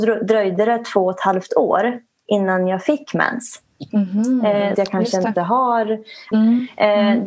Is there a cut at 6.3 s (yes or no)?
yes